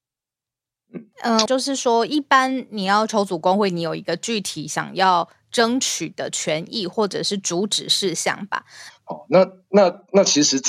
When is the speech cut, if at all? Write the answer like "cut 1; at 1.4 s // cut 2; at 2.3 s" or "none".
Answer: cut 1; at 1.5 s // cut 2; at 8.9 s

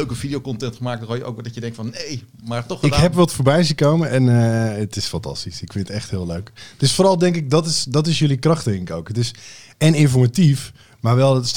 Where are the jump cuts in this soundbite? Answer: none

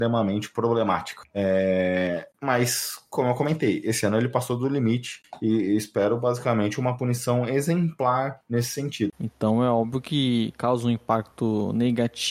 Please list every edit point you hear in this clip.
cut 1; at 9.1 s

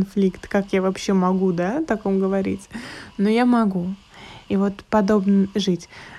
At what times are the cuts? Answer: cut 1; at 4.5 s

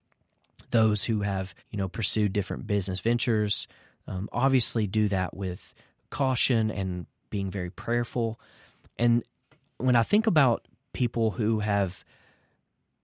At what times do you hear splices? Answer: cut 1; at 1.6 s // cut 2; at 8.9 s

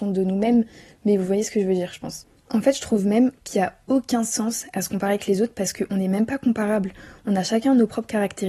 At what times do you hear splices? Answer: none

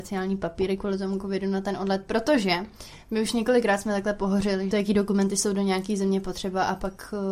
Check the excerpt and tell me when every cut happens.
cut 1; at 4.7 s

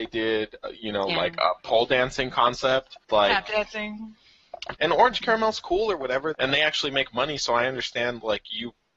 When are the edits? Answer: cut 1; at 3.0 s // cut 2; at 4.8 s // cut 3; at 6.3 s

